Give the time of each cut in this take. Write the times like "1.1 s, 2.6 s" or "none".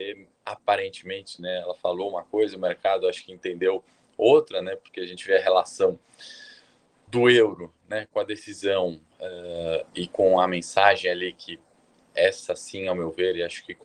none